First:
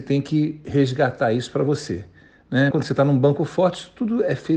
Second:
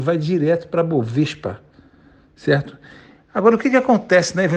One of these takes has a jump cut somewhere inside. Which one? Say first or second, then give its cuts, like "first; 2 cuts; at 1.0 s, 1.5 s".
first; 1 cut; at 2.7 s